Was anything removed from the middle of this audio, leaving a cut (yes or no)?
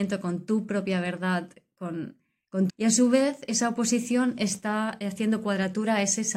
yes